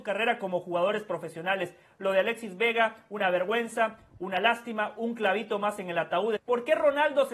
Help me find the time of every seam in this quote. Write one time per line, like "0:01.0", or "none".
0:06.4